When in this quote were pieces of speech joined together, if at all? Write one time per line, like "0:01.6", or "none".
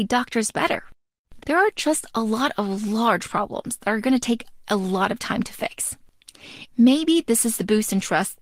0:01.4
0:06.7